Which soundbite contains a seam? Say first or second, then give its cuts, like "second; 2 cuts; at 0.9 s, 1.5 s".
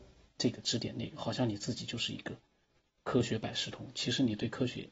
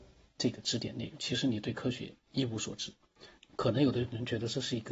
second; 2 cuts; at 1.2 s, 3.4 s